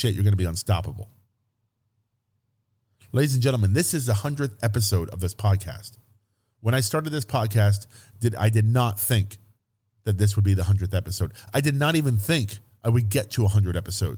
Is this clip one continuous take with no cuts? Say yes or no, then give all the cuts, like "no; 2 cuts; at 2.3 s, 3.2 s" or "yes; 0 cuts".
yes; 0 cuts